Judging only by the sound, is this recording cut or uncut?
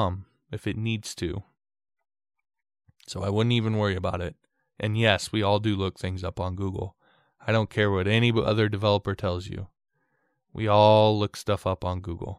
uncut